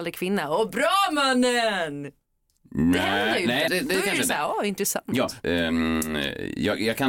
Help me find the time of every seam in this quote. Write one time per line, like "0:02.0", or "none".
0:03.7
0:05.4